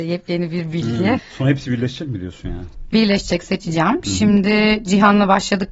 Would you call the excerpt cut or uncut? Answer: cut